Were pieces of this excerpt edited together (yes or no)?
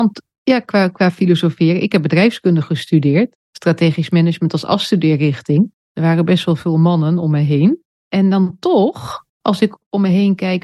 yes